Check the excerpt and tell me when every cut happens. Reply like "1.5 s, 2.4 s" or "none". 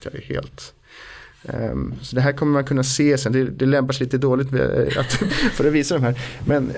3.3 s, 5.3 s